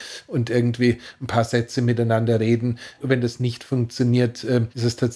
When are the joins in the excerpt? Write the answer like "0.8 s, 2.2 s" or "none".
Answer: none